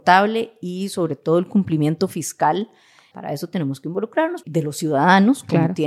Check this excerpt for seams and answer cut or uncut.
cut